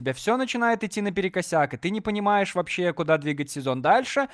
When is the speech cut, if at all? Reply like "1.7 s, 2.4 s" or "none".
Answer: none